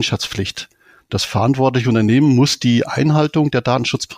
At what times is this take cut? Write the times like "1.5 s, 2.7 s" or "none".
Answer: none